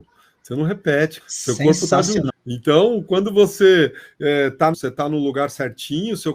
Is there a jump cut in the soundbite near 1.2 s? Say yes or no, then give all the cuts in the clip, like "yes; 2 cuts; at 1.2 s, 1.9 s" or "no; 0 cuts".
yes; 3 cuts; at 1.2 s, 2.3 s, 4.7 s